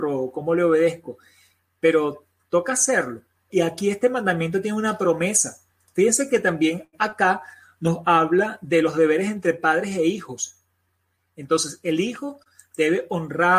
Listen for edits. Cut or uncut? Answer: cut